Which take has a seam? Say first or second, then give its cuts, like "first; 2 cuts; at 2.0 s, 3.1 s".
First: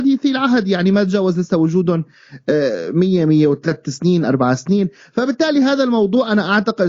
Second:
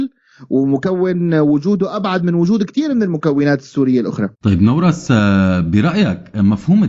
second; 1 cut; at 4.3 s